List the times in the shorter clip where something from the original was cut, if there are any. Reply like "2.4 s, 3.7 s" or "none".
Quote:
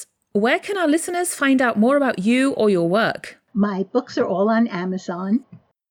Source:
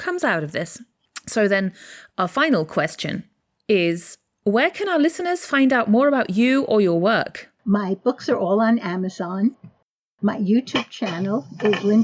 none